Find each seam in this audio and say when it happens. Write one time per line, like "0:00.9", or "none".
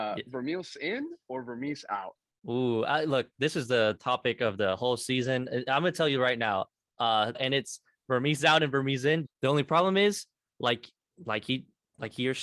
0:07.3
0:09.2